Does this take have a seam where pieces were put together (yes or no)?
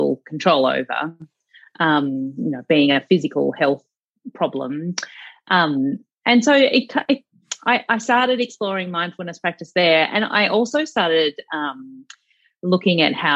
no